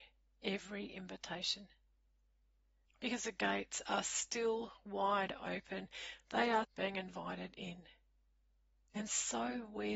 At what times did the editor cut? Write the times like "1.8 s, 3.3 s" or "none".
2.9 s, 6.6 s